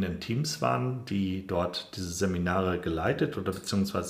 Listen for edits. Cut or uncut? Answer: uncut